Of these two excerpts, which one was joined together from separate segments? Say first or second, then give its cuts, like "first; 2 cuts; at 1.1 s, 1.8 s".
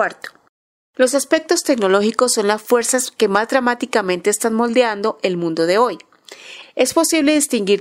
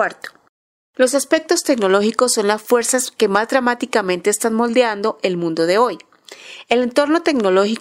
first; 1 cut; at 6.6 s